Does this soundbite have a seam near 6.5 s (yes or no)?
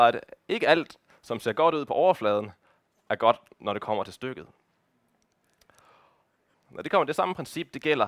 yes